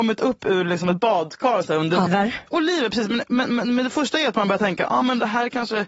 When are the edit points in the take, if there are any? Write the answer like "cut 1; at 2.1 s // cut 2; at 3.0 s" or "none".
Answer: cut 1; at 2.1 s